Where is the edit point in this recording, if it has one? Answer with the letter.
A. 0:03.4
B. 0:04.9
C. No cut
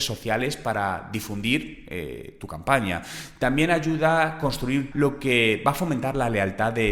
B